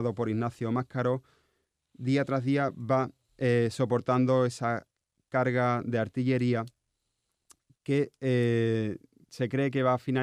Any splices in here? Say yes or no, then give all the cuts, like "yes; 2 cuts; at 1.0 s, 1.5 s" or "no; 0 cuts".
no; 0 cuts